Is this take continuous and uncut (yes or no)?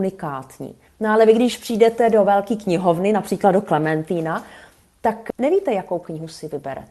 yes